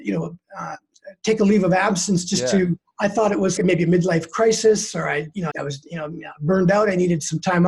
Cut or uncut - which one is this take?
cut